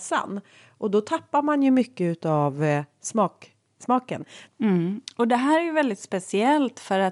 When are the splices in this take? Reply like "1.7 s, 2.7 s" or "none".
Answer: 4.5 s